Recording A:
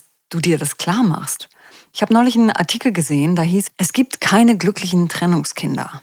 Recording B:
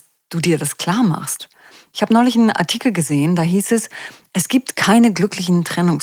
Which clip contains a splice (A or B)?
A